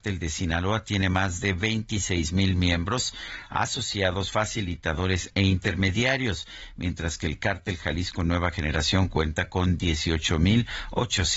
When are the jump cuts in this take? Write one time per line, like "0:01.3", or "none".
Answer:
none